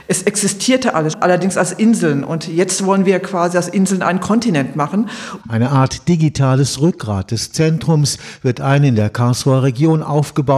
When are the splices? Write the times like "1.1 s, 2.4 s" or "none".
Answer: 1.1 s, 5.4 s